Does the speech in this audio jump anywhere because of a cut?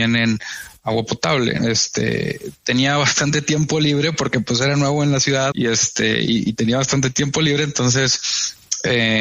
yes; 2 cuts; at 1.6 s, 5.5 s

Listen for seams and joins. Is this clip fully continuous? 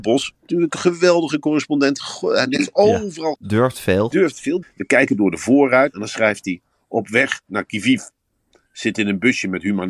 no; 3 cuts; at 3.3 s, 4.6 s, 5.9 s

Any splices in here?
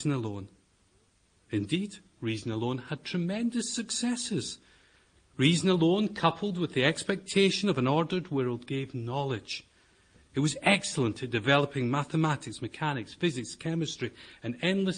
no; 0 cuts

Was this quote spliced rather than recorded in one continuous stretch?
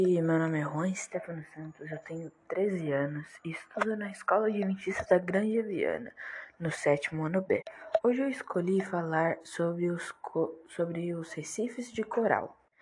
no; 0 cuts

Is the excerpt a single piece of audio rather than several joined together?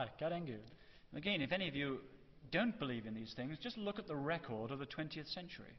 yes; 0 cuts

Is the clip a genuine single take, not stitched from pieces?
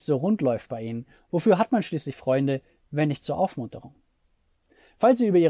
yes; 0 cuts

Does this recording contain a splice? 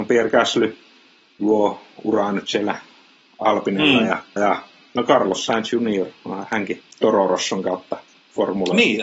yes; 2 cuts; at 4.4 s, 6.9 s

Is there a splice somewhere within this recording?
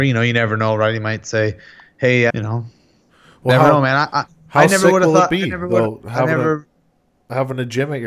yes; 1 cut; at 2.3 s

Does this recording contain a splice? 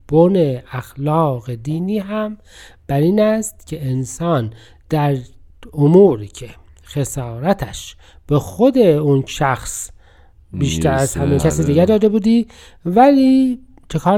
yes; 1 cut; at 11.4 s

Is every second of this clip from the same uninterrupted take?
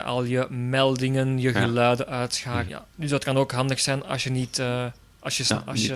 no; 1 cut; at 2.7 s

